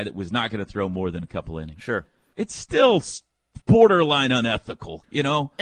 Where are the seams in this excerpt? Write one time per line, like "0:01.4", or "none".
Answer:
0:02.3
0:03.6

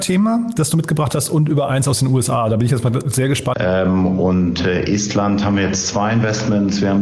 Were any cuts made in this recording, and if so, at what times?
0:03.5

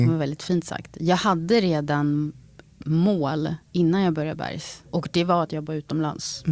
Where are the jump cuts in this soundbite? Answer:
0:03.6

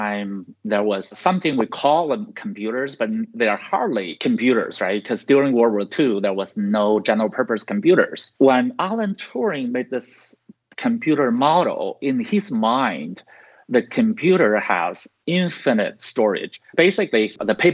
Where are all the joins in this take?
0:08.3

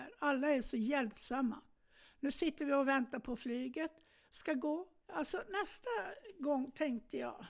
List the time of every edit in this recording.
0:05.0

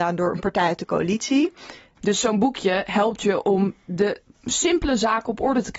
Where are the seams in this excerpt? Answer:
0:02.0

